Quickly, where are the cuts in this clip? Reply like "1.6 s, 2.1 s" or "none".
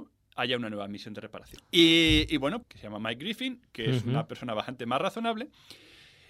1.6 s, 2.6 s